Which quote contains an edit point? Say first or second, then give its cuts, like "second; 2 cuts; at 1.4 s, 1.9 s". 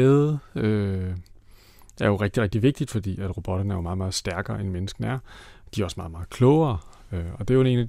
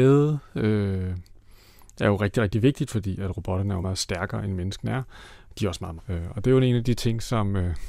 second; 2 cuts; at 3.8 s, 6.0 s